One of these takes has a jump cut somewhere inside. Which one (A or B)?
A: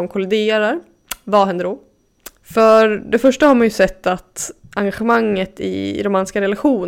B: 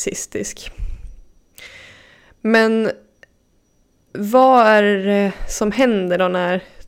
A